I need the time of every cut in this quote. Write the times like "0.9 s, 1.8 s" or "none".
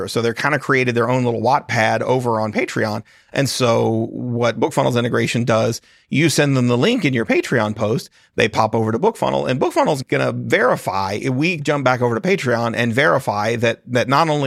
3.2 s